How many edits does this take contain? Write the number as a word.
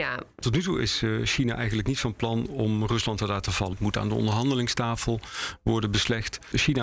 one